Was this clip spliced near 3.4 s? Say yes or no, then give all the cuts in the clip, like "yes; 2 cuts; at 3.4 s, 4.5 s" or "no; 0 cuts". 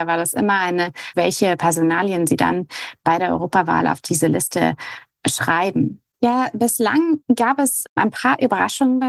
no; 2 cuts; at 1.1 s, 6.1 s